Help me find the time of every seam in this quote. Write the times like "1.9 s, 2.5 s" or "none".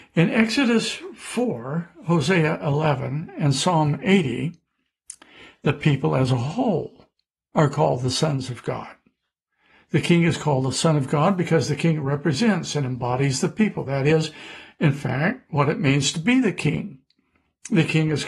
none